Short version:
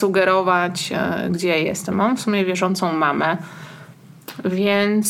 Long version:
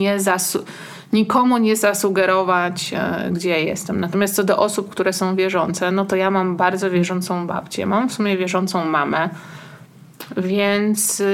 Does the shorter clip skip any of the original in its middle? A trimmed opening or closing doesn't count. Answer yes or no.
yes